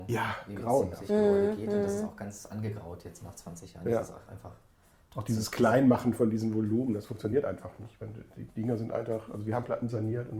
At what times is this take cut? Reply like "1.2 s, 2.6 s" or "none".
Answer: none